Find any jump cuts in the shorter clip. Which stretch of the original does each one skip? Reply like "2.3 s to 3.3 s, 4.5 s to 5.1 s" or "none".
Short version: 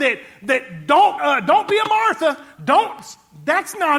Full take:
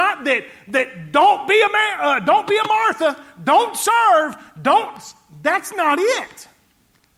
1.4 s to 2.0 s, 3.3 s to 4.5 s